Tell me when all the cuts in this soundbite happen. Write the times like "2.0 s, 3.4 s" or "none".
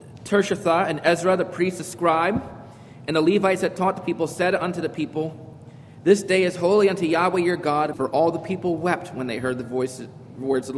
7.9 s